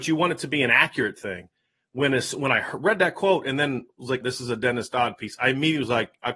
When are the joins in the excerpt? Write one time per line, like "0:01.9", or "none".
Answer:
0:04.2